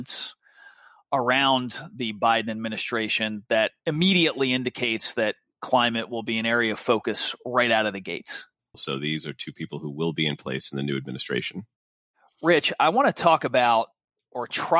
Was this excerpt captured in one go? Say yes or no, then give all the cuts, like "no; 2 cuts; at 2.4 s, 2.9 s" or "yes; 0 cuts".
no; 1 cut; at 8.7 s